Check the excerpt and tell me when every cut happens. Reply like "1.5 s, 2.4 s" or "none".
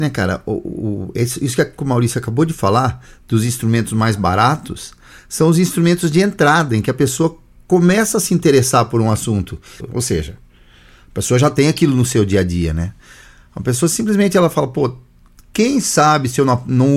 9.8 s